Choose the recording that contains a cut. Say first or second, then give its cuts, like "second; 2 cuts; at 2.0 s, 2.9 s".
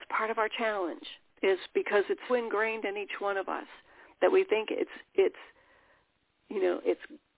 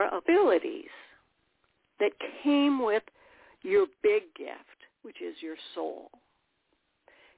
first; 1 cut; at 2.3 s